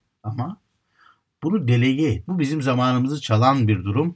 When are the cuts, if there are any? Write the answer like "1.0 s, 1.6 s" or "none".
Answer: 2.3 s